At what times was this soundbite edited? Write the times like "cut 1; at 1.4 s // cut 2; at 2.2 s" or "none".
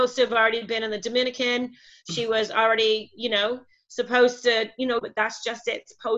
cut 1; at 5.0 s